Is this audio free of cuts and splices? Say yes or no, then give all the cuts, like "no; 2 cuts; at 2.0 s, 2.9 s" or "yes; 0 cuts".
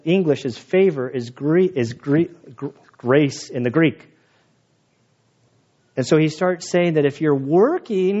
yes; 0 cuts